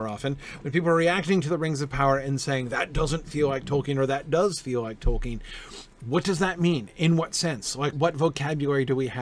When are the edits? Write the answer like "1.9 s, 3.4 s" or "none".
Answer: 7.9 s

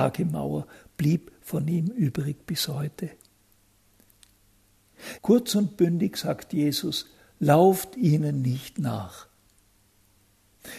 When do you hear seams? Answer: 5.2 s

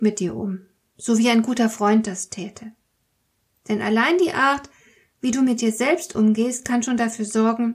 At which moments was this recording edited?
none

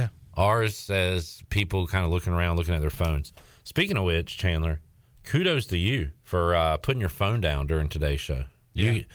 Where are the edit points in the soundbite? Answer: 6.2 s

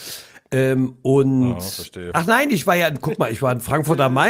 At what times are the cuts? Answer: 2.1 s

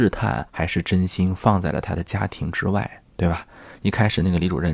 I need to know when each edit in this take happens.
3.0 s

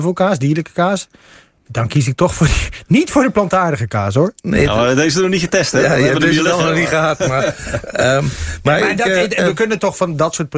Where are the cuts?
none

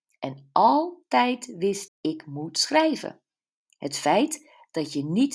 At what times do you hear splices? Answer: 1.9 s, 3.7 s

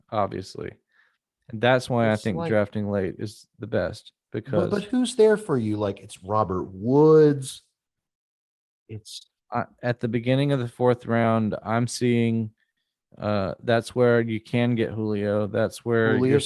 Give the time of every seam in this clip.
none

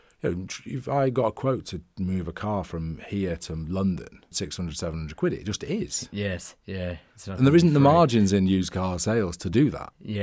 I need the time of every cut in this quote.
4.3 s

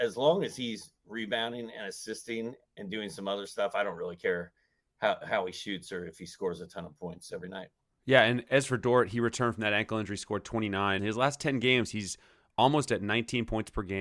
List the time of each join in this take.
11.0 s

